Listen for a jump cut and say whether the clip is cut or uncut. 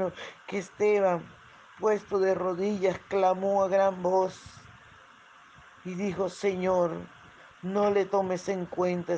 uncut